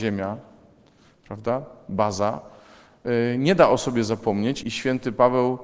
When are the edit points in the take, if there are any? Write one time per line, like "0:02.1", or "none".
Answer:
0:04.6